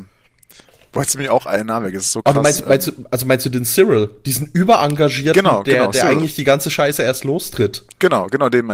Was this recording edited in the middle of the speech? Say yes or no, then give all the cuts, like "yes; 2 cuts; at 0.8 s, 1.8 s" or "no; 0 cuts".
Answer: no; 0 cuts